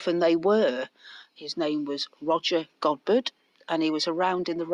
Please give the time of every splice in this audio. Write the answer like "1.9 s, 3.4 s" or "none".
1.3 s